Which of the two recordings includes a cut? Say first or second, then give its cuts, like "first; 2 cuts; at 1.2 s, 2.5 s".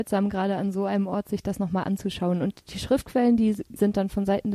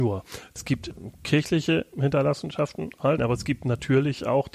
second; 1 cut; at 3.2 s